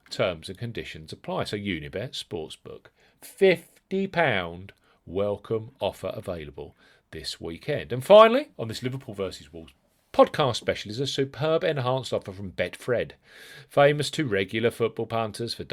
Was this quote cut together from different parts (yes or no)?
yes